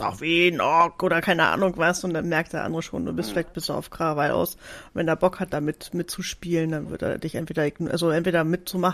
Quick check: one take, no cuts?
yes; 0 cuts

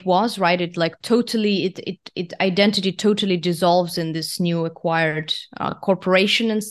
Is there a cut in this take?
no; 0 cuts

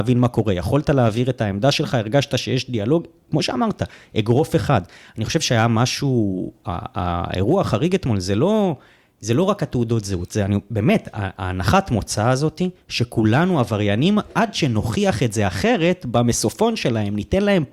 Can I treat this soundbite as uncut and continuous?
yes; 0 cuts

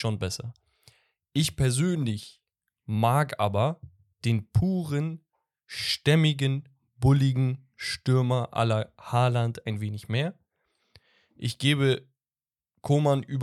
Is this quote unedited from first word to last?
yes; 0 cuts

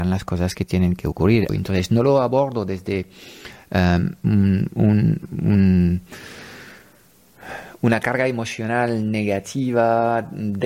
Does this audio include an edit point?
yes; 1 cut; at 1.5 s

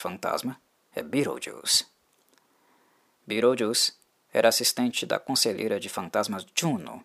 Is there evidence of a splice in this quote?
no; 0 cuts

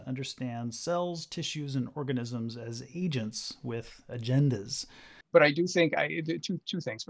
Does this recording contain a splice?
yes; 1 cut; at 5.2 s

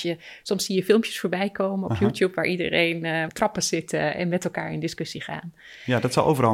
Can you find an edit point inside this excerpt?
yes; 1 cut; at 3.3 s

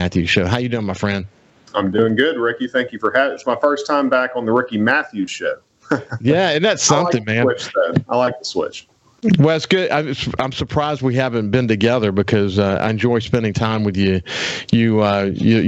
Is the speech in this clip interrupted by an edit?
no; 0 cuts

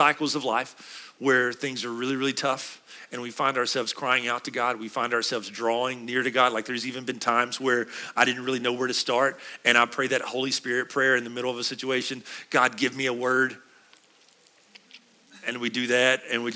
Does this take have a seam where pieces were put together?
no; 0 cuts

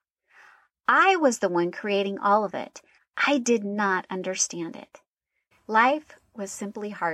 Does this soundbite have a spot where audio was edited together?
yes; 2 cuts; at 3.0 s, 5.5 s

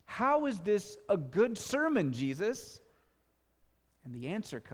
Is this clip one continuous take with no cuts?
yes; 0 cuts

